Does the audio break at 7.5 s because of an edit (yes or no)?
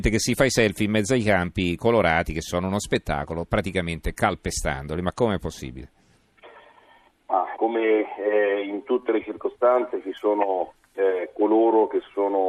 yes